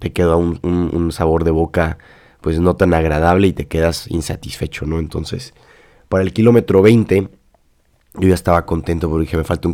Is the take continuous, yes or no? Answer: yes